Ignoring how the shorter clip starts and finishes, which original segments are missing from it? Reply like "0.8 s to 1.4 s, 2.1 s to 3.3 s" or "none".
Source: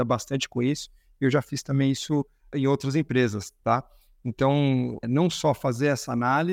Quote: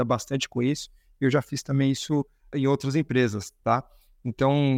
none

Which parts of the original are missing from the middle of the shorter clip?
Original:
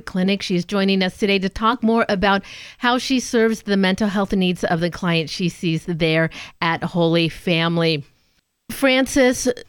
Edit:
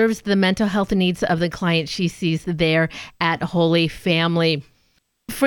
none

